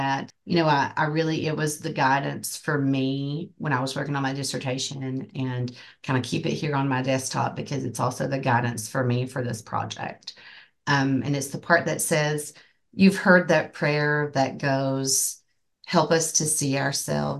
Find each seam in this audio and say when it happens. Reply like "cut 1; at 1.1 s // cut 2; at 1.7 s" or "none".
none